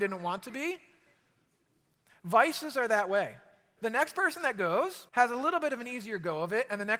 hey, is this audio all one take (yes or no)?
no